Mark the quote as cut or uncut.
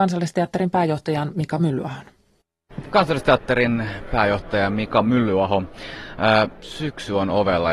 uncut